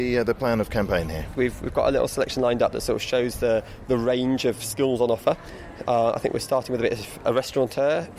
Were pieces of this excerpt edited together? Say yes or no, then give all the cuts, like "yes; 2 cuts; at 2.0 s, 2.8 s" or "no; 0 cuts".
yes; 1 cut; at 1.3 s